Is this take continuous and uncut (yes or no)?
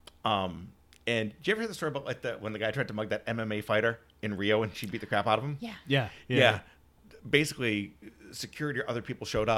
yes